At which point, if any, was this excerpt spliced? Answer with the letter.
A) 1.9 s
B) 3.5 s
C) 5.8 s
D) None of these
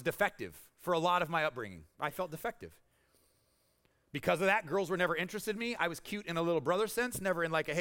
D